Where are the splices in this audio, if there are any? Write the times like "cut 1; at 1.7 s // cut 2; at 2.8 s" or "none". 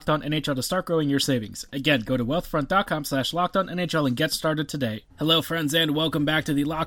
cut 1; at 5.1 s